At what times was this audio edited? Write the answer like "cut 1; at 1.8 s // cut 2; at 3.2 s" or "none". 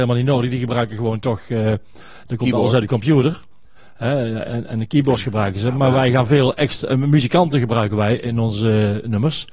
none